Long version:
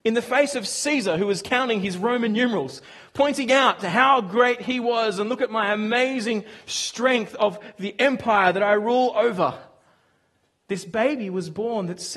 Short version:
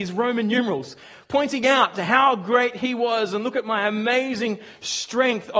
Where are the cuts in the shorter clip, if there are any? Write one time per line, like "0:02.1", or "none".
none